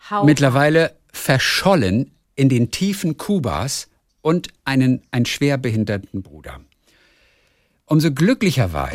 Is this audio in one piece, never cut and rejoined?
yes; 0 cuts

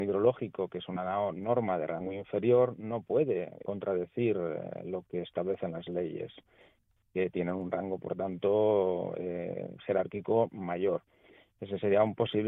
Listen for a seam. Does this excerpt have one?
yes; 1 cut; at 3.6 s

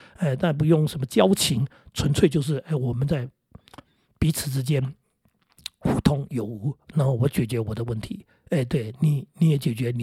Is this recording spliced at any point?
no; 0 cuts

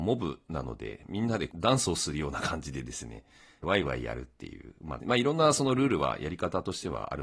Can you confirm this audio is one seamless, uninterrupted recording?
no; 2 cuts; at 3.6 s, 5.0 s

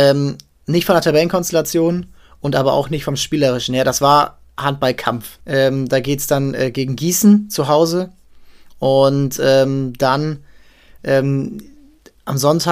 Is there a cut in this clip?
yes; 1 cut; at 5.4 s

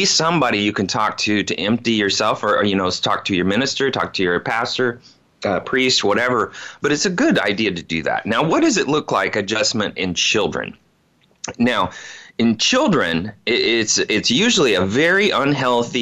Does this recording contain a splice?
no; 0 cuts

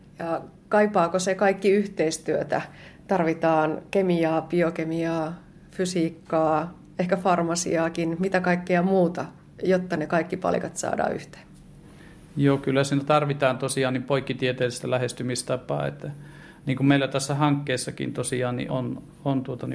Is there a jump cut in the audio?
yes; 1 cut; at 18.7 s

